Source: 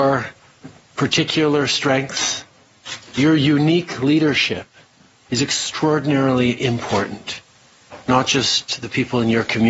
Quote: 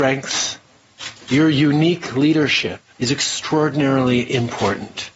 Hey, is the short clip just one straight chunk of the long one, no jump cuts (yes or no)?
no